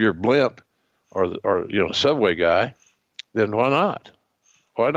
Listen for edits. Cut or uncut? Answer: uncut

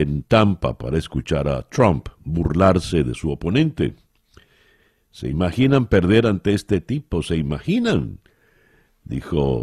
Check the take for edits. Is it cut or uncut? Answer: uncut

